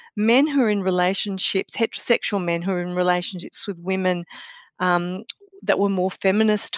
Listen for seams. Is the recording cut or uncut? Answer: uncut